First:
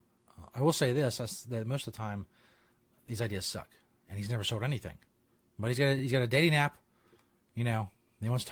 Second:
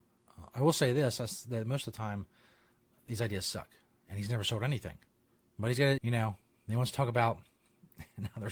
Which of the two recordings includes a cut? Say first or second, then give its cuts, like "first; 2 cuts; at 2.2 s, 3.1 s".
second; 1 cut; at 6.0 s